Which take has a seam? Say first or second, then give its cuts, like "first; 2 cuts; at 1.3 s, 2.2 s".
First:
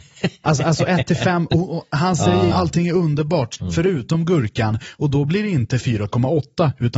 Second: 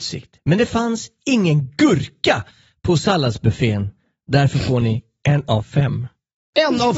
first; 2 cuts; at 2.5 s, 3.6 s